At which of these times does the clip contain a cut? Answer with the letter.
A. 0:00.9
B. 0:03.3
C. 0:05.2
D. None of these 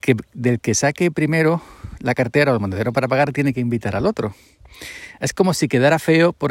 D